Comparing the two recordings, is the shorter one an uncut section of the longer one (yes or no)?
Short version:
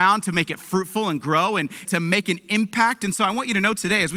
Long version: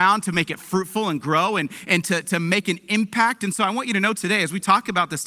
no